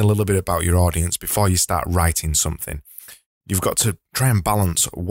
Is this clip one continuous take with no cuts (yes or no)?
yes